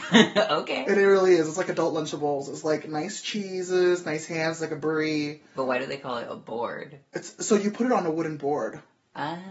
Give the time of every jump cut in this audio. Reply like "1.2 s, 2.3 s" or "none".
none